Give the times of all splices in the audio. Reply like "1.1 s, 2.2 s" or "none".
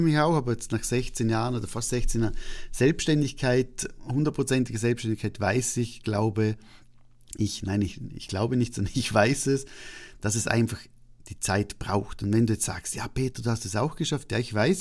none